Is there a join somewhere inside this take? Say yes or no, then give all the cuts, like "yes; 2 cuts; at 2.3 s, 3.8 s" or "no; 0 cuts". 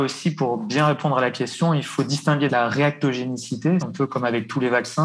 yes; 2 cuts; at 2.5 s, 3.8 s